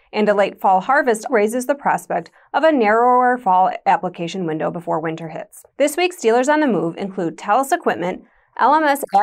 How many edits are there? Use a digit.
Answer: 2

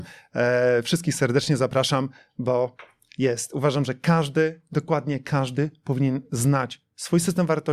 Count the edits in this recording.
0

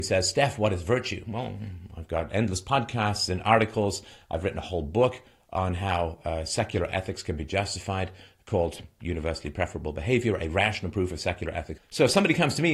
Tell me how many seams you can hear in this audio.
1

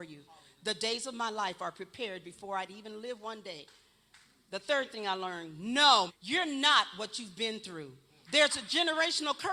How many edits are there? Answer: 2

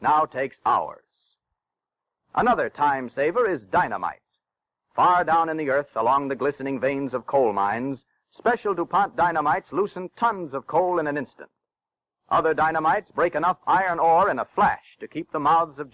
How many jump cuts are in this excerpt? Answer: 0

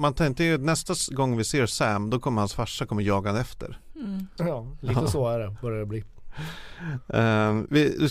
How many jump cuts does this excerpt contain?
1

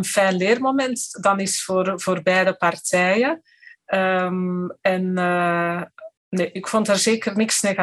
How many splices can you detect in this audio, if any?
1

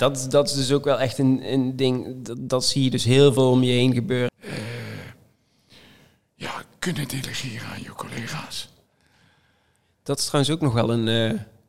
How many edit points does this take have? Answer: 1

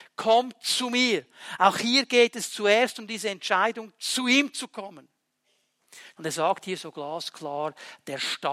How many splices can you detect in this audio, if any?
1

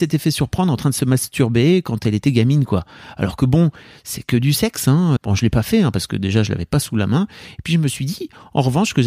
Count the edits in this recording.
1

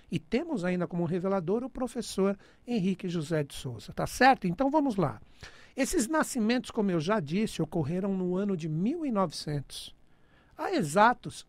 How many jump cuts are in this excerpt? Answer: 0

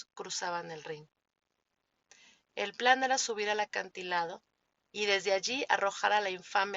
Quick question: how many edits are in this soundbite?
0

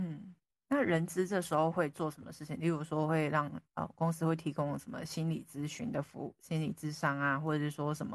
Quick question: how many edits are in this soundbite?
0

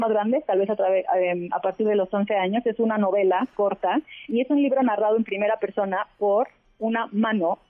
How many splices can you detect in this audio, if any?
1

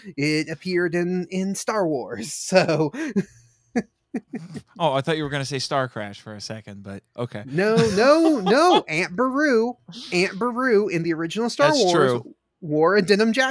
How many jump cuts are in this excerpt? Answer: 0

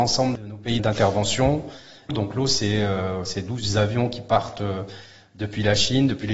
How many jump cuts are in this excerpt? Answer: 1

